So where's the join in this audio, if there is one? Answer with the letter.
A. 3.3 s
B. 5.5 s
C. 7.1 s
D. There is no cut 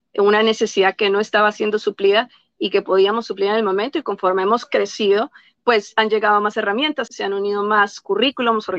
C